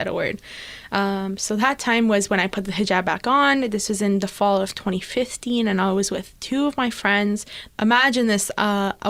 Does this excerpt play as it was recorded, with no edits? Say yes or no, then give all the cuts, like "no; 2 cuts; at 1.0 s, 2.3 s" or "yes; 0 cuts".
no; 1 cut; at 7.7 s